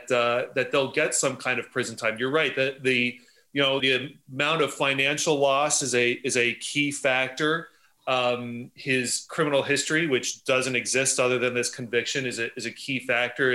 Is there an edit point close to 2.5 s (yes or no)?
no